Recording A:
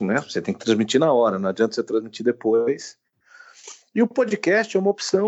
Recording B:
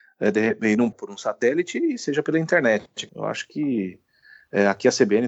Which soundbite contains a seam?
B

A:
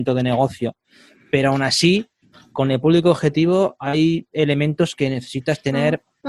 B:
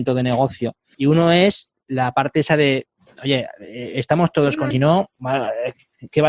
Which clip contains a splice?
B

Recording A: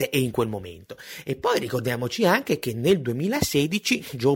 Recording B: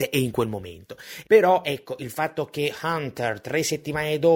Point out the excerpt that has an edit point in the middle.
B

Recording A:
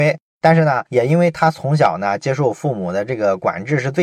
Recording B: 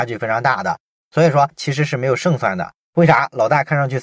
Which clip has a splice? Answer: B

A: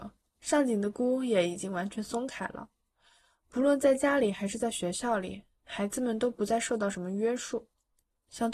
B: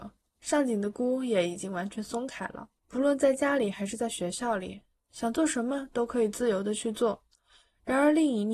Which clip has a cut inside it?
B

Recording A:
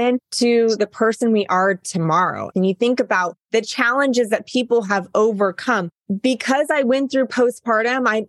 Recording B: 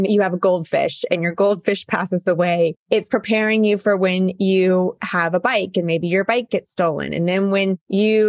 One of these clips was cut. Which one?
A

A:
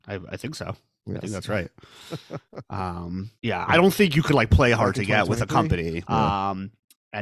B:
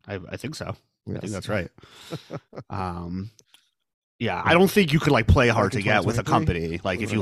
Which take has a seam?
A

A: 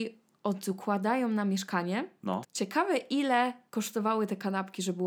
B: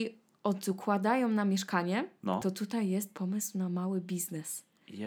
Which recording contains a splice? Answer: A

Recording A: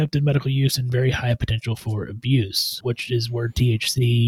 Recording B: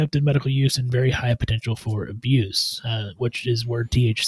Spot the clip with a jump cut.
A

